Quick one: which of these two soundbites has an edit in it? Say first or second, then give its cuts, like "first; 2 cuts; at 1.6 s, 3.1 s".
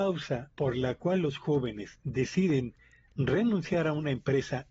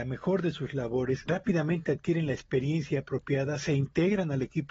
second; 1 cut; at 1.3 s